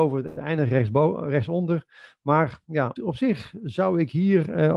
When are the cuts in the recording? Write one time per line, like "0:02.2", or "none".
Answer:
0:03.0